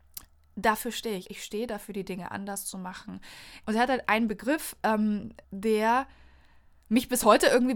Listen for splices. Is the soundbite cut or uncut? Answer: cut